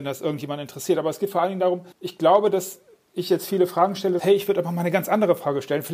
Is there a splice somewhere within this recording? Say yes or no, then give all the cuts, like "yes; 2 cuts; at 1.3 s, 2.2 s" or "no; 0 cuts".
yes; 2 cuts; at 1.9 s, 4.2 s